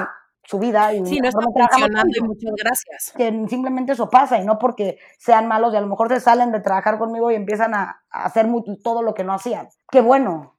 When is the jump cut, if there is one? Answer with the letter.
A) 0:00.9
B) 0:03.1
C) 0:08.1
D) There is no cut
B